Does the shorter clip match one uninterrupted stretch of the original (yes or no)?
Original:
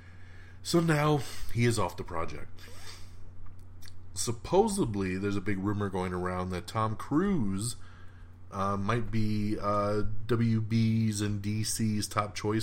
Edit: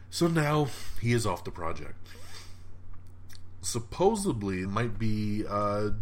no